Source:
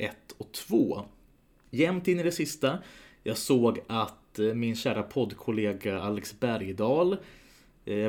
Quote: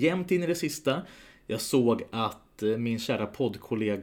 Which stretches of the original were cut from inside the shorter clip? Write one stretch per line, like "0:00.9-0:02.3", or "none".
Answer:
none